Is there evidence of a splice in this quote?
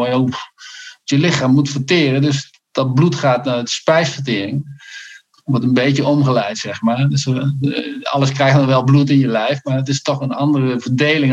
no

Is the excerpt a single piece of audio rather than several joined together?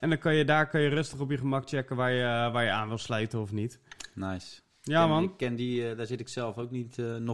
yes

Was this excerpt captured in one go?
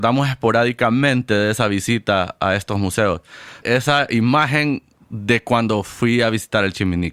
no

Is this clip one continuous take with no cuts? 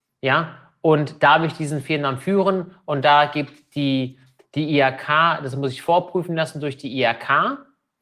yes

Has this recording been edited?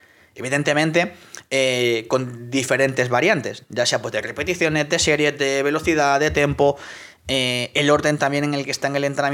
no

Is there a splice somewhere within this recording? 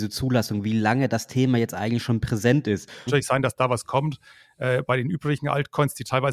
yes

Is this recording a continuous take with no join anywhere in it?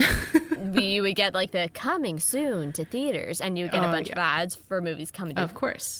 yes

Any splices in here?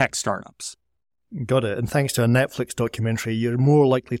no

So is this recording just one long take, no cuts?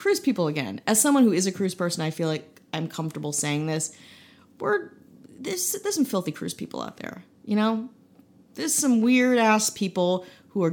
yes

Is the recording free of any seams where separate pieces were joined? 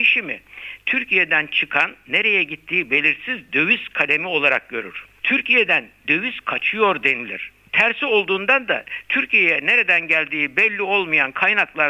yes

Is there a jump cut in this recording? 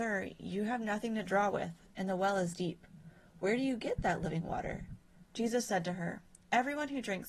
yes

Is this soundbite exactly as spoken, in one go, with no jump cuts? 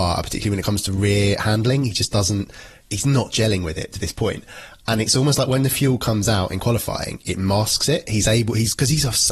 no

